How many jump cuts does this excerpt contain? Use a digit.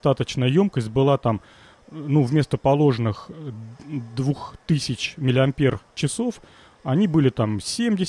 0